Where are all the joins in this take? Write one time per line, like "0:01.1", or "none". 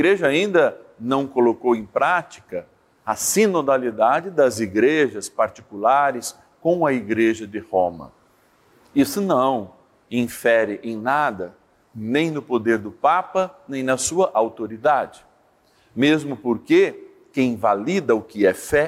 none